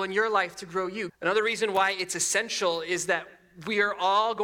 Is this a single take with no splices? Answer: no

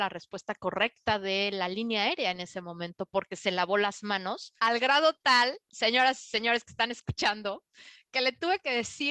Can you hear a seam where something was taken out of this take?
yes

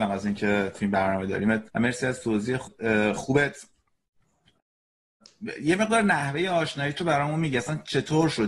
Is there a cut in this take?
yes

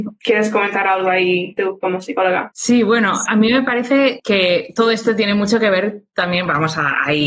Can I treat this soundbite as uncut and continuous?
no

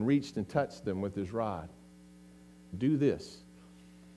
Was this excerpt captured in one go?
no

